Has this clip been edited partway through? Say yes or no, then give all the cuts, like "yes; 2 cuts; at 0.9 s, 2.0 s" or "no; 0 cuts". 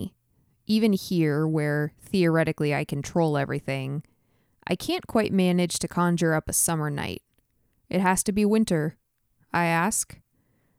yes; 1 cut; at 9.3 s